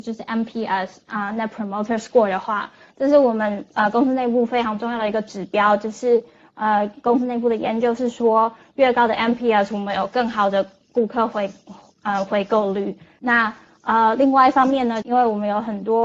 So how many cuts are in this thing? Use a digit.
2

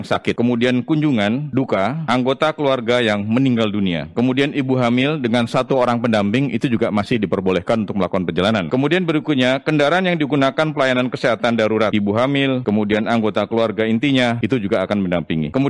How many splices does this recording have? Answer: 1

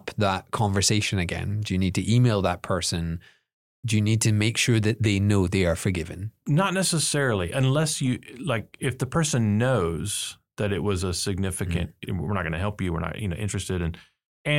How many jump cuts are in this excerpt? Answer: 1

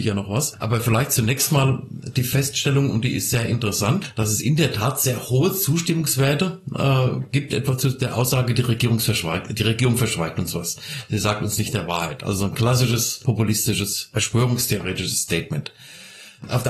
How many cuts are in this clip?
0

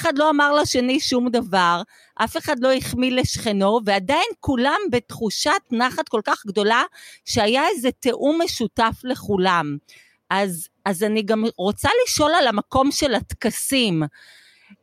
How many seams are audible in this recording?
0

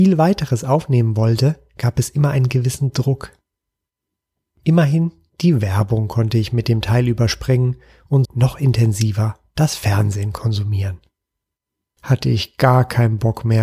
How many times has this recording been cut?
2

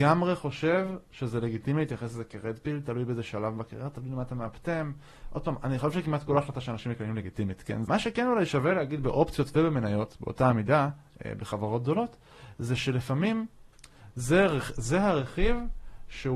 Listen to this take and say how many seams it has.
1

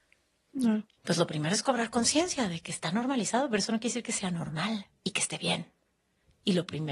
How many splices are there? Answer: 2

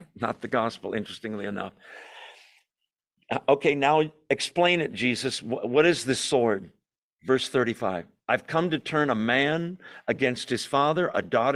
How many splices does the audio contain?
0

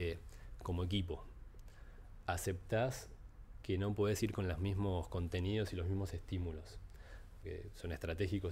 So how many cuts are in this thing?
1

